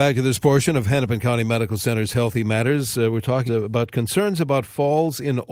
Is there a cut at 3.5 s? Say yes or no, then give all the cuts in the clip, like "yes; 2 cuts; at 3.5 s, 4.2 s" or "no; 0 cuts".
yes; 1 cut; at 3.5 s